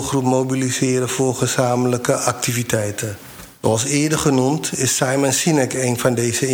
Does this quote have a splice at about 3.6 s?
yes; 1 cut; at 3.6 s

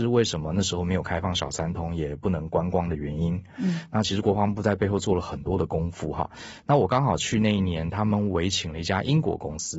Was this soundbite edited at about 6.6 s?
no; 0 cuts

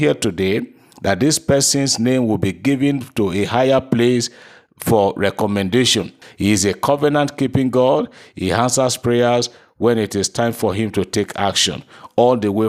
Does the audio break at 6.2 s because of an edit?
yes; 1 cut; at 6.2 s

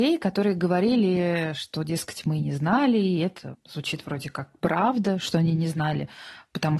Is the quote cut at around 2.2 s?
no; 1 cut; at 3.5 s

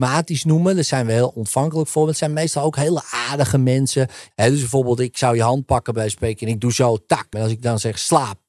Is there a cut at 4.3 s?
yes; 2 cuts; at 4.3 s, 7.3 s

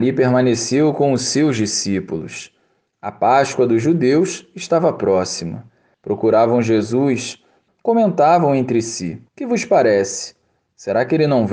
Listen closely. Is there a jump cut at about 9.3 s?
yes; 3 cuts; at 5.9 s, 7.7 s, 9.3 s

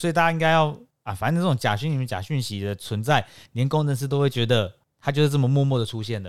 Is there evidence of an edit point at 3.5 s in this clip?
no; 0 cuts

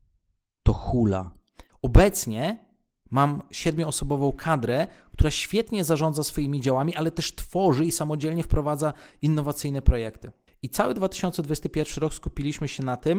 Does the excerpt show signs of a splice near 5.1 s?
no; 2 cuts; at 1.7 s, 10.5 s

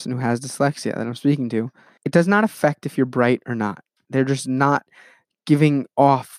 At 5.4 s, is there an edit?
no; 2 cuts; at 2.0 s, 4.0 s

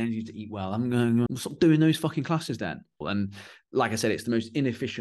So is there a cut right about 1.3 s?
yes; 2 cuts; at 1.3 s, 3.0 s

